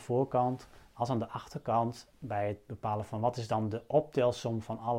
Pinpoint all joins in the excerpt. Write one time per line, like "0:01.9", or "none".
none